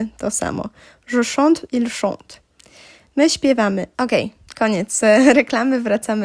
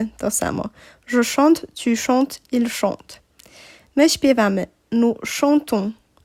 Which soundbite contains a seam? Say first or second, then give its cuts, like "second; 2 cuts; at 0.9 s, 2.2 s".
first; 2 cuts; at 1.7 s, 3.9 s